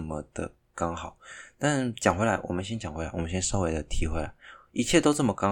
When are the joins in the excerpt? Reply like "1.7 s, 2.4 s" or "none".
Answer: none